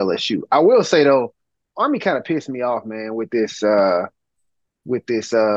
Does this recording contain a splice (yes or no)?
no